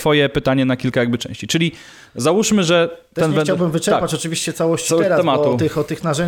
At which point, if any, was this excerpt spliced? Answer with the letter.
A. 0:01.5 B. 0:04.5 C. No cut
C